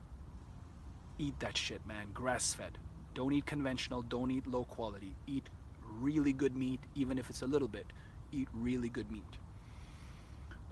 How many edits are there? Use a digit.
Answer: 0